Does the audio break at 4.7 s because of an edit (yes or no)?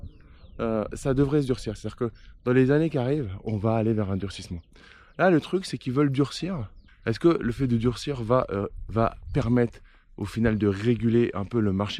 no